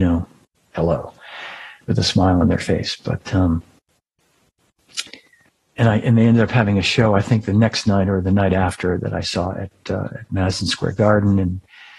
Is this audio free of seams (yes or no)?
yes